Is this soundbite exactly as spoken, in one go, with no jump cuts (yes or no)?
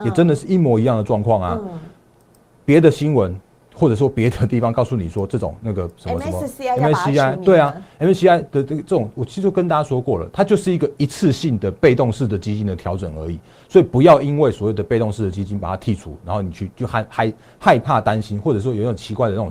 yes